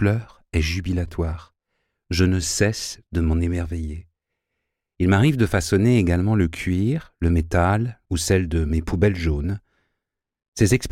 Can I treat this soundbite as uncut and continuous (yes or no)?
no